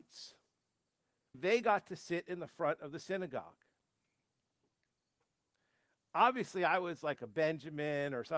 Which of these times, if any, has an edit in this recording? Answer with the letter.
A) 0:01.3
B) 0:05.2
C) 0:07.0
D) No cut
A